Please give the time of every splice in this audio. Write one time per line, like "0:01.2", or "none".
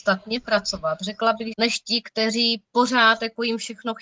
0:01.5